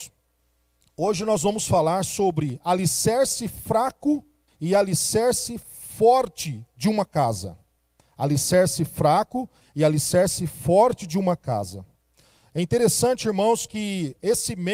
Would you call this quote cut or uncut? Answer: uncut